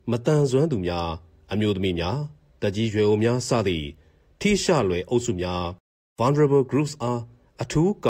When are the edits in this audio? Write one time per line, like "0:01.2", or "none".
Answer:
none